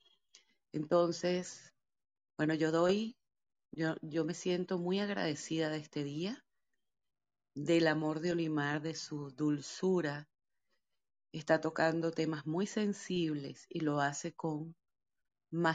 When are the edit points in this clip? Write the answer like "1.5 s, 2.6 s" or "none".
none